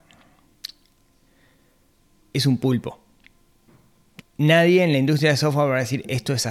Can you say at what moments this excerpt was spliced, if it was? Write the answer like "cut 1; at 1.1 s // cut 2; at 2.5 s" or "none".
cut 1; at 4.2 s